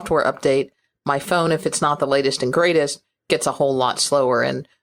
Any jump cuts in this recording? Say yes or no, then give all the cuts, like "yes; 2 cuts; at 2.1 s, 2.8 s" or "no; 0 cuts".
no; 0 cuts